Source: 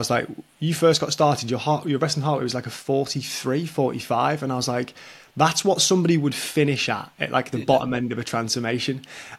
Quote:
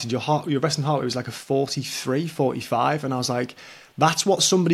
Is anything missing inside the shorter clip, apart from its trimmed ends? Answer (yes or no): no